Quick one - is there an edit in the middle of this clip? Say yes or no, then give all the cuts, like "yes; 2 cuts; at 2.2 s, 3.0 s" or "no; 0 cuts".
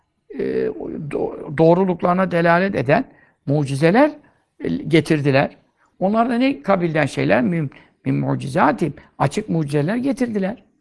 yes; 1 cut; at 5.9 s